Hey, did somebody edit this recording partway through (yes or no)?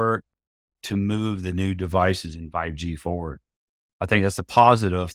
yes